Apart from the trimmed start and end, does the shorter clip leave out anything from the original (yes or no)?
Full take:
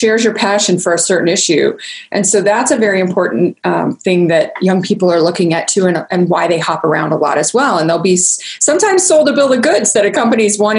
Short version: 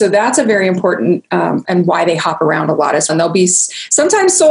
yes